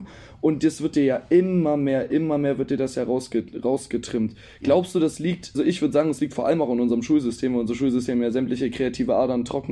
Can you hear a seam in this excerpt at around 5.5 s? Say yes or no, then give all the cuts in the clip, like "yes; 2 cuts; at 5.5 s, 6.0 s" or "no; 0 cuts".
yes; 1 cut; at 5.5 s